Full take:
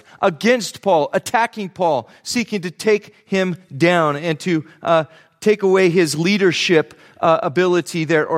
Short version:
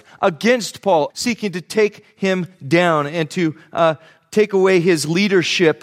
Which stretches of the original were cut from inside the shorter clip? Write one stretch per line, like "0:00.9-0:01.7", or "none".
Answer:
0:01.1-0:02.2